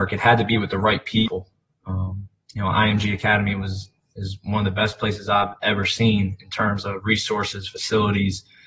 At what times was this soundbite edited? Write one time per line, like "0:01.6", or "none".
none